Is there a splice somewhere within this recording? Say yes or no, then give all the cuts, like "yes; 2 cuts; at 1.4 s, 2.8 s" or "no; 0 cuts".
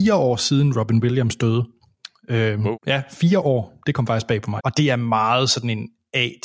yes; 2 cuts; at 2.7 s, 4.6 s